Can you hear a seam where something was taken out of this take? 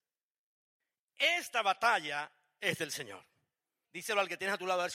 yes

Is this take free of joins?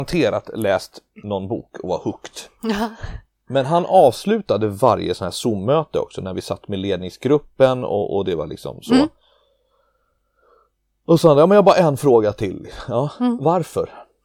yes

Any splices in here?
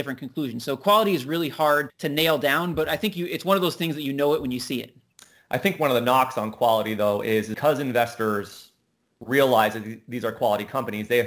yes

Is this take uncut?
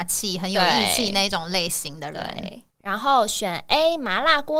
yes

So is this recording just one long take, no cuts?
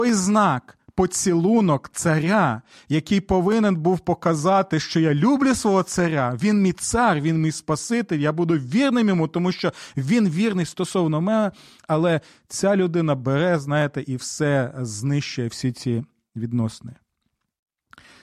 yes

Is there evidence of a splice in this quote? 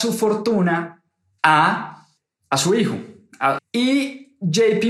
yes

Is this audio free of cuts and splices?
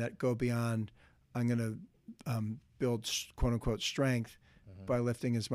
yes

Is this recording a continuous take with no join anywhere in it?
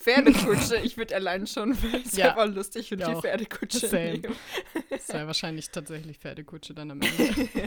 no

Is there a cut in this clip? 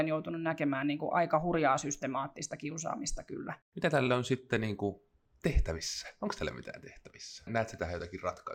yes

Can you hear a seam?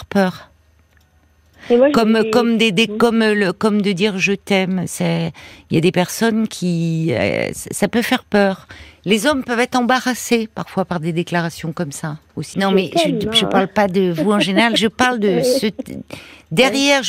yes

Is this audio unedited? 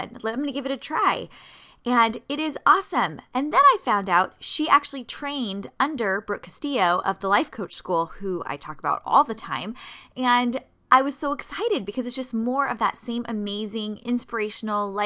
yes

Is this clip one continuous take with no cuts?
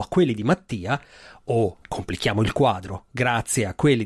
yes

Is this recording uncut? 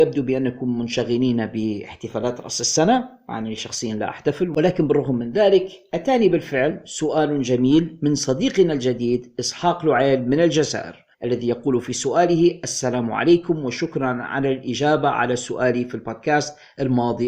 no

